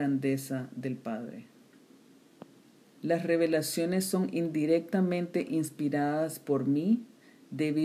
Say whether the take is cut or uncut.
cut